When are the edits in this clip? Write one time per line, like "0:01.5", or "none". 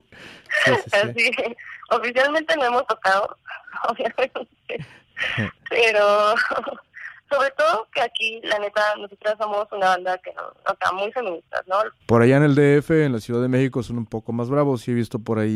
0:07.3
0:12.0